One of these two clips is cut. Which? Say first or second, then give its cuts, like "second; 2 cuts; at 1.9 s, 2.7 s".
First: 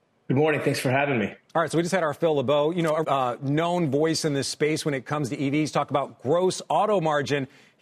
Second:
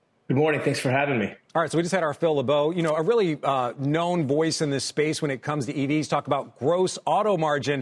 first; 1 cut; at 3.0 s